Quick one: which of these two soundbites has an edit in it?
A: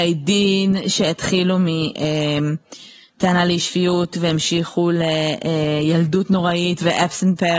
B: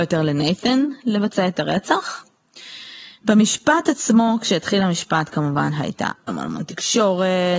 B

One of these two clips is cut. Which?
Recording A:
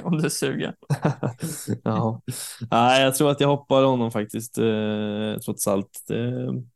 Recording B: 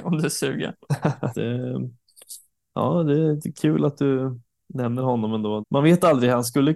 B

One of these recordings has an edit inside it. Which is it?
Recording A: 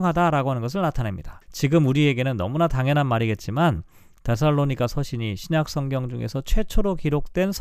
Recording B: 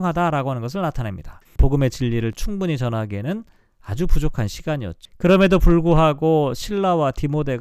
B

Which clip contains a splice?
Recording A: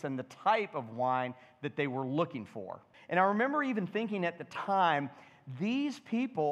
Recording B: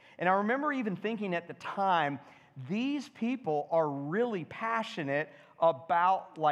A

